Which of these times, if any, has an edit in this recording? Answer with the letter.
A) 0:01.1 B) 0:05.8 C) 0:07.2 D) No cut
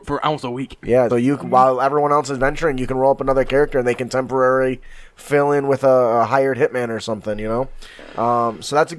A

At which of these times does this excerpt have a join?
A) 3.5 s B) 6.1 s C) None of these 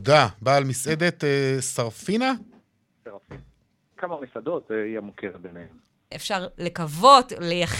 B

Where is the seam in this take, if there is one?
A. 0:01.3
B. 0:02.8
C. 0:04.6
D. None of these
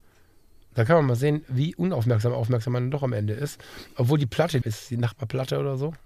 C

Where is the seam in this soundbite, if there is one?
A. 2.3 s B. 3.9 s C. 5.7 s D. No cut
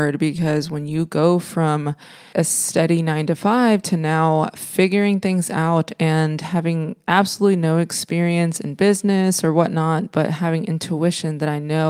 A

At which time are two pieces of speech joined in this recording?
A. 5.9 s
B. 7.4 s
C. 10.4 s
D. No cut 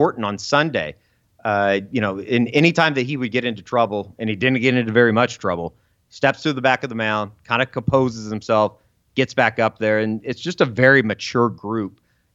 D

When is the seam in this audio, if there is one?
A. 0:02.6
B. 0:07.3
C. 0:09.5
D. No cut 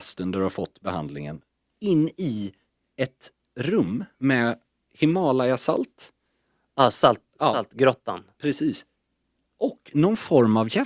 B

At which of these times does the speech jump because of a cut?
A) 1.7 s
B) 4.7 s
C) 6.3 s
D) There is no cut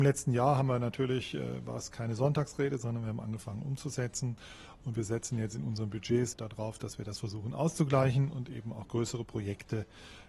C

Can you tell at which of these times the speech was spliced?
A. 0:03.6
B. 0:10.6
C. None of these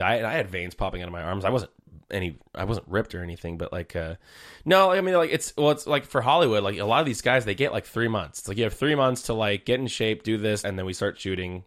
B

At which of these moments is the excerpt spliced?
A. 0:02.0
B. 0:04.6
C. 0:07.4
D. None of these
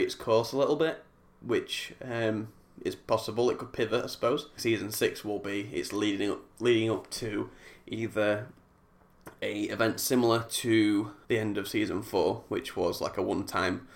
B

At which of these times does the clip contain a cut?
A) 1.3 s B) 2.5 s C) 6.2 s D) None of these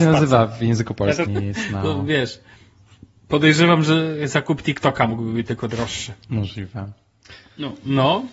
A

